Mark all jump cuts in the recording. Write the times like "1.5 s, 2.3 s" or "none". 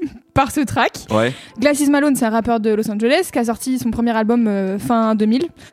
1.5 s

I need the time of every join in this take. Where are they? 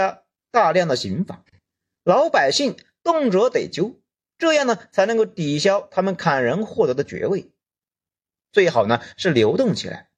8.4 s

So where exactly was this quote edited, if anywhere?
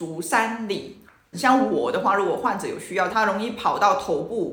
1.3 s, 3.1 s

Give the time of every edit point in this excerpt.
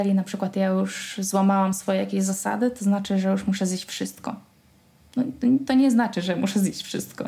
none

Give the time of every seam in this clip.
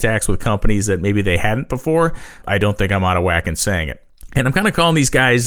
2.4 s, 4.3 s

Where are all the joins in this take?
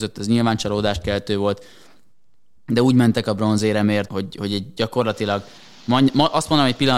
4.1 s

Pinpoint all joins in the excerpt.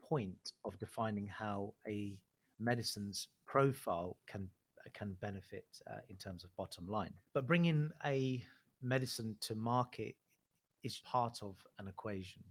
7.3 s, 11.0 s

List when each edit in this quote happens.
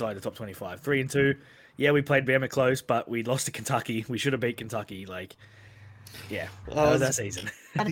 6.7 s

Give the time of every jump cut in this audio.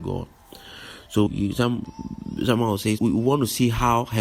1.3 s, 3.0 s

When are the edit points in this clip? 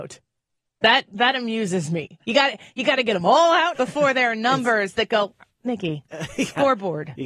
3.7 s

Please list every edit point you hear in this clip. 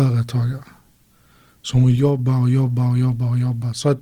none

